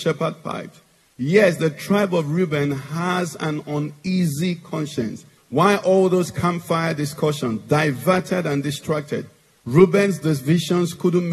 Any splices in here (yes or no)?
yes